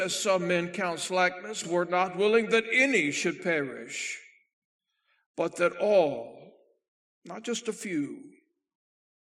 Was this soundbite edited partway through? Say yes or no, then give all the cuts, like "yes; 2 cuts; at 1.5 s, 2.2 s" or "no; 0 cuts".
yes; 1 cut; at 1.6 s